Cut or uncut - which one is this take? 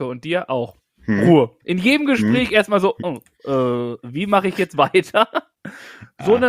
uncut